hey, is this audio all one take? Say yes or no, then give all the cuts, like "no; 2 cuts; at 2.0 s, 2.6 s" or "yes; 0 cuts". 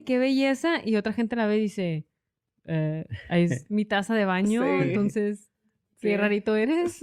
yes; 0 cuts